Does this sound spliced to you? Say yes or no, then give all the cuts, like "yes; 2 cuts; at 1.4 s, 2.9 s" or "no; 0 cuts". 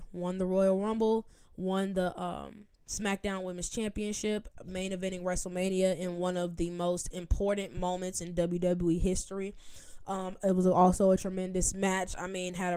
no; 0 cuts